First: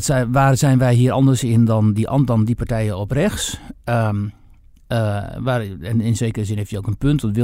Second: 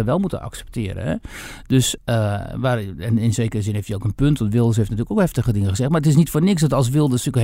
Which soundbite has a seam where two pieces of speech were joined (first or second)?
second